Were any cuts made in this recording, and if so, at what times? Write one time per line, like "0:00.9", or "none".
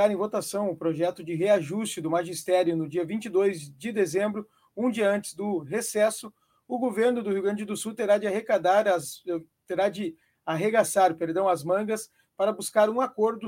none